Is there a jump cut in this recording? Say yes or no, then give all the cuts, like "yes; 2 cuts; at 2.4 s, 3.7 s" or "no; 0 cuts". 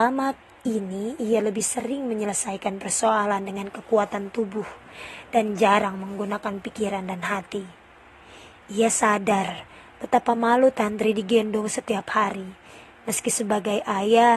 no; 0 cuts